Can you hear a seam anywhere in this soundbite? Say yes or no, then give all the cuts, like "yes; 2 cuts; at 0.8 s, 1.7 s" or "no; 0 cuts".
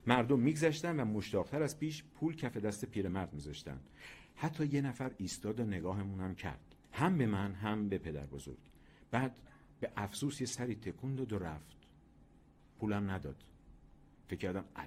yes; 1 cut; at 6.8 s